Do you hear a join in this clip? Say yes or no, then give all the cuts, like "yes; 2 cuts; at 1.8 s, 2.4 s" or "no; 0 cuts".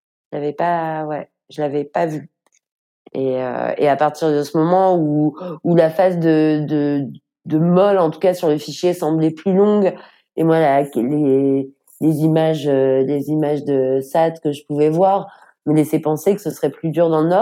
no; 0 cuts